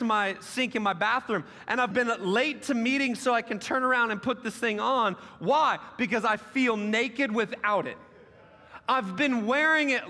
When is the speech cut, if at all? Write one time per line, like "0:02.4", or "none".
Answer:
0:01.9